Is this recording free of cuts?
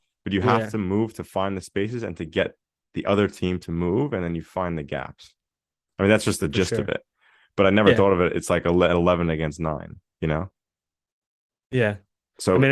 yes; 0 cuts

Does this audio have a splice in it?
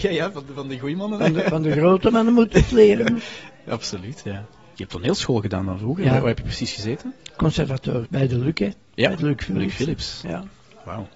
yes; 1 cut; at 8.1 s

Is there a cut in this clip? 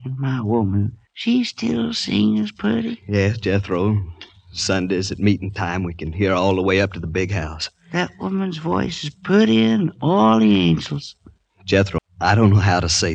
yes; 2 cuts; at 1.1 s, 12.0 s

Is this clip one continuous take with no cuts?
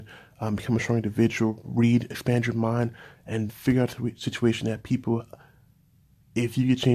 no; 1 cut; at 3.5 s

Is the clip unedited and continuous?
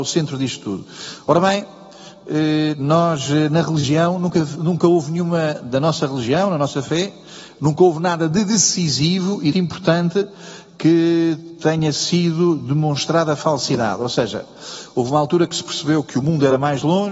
no; 1 cut; at 9.5 s

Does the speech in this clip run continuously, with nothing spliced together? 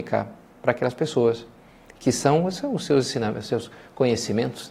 yes; 0 cuts

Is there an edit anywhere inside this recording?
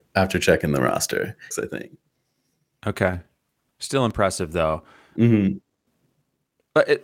yes; 1 cut; at 1.5 s

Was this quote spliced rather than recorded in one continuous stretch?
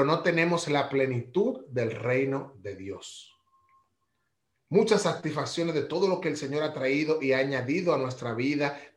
no; 0 cuts

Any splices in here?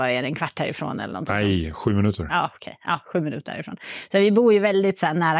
no; 0 cuts

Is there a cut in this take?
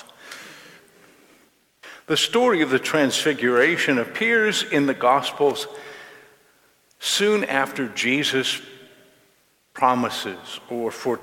no; 0 cuts

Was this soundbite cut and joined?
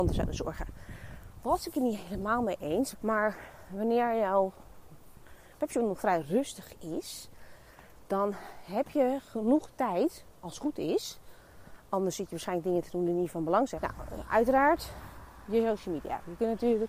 yes; 2 cuts; at 2.9 s, 13.8 s

